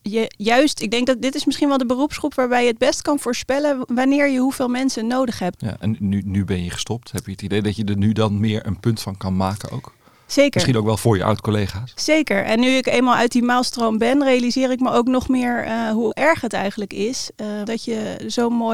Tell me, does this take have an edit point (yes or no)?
yes